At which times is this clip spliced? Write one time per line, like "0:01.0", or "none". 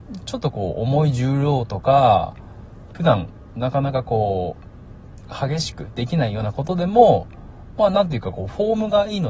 0:02.9